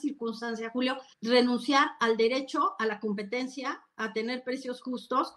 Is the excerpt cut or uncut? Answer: cut